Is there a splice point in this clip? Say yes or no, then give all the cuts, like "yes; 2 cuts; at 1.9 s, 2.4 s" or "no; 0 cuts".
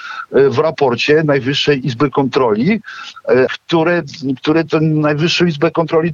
yes; 1 cut; at 3.5 s